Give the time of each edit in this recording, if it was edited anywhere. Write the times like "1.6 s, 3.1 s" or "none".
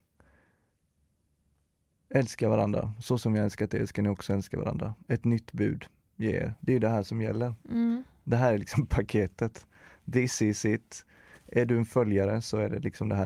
none